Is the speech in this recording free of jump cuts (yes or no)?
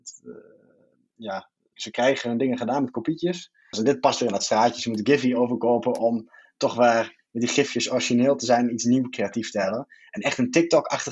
no